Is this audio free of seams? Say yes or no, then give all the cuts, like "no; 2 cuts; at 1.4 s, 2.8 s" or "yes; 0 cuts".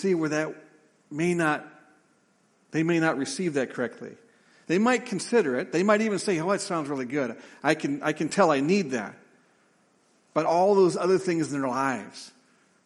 yes; 0 cuts